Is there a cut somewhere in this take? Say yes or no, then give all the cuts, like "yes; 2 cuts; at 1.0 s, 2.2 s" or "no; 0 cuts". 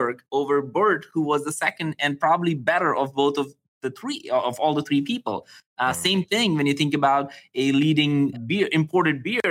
yes; 1 cut; at 8.3 s